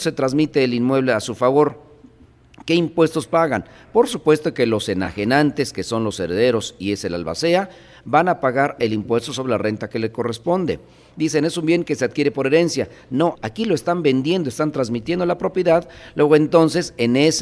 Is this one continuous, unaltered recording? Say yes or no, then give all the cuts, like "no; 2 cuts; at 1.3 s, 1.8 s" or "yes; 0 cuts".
no; 1 cut; at 13.3 s